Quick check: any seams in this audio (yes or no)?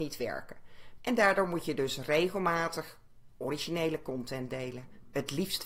yes